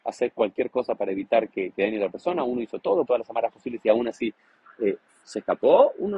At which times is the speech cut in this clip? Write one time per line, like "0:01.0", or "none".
0:03.1